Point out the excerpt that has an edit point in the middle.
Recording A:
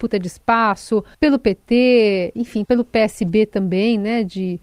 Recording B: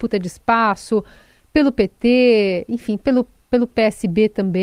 A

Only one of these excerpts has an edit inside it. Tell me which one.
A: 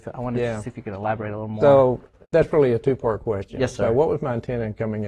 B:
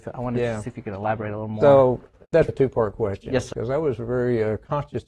B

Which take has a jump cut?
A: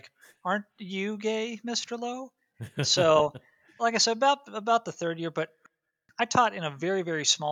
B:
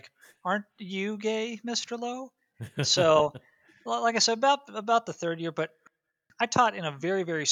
A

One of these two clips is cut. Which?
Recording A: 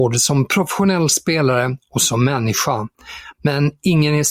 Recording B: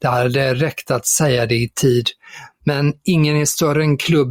A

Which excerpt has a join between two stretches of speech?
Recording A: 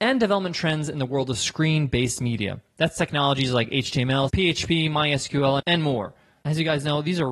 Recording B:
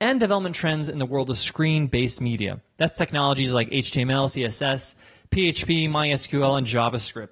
A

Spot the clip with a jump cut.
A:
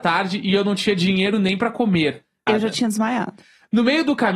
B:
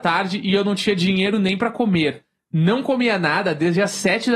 A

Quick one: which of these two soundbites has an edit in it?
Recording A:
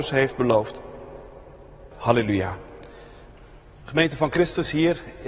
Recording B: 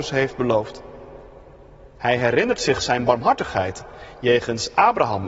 A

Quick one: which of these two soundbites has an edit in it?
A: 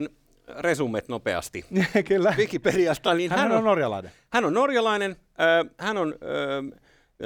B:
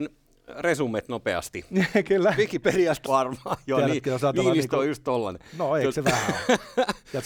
B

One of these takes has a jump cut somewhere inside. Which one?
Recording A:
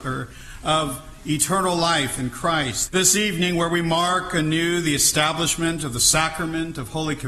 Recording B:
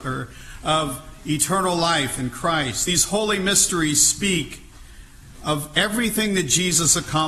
A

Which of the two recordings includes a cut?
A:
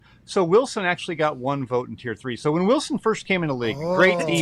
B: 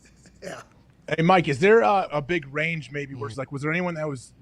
B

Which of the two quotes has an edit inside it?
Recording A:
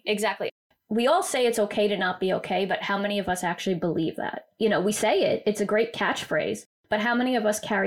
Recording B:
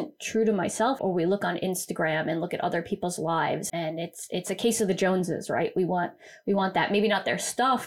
B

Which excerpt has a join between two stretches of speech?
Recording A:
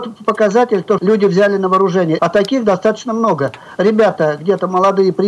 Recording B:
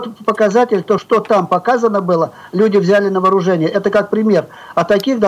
A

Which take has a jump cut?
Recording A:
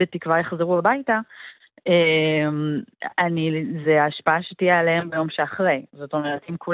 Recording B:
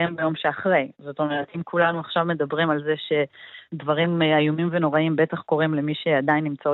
A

